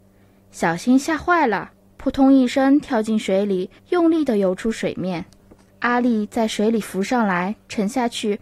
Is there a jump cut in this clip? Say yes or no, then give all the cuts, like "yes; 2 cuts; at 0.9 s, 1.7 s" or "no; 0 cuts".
yes; 2 cuts; at 3.8 s, 5.7 s